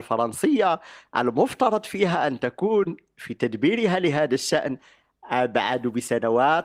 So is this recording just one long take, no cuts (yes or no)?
yes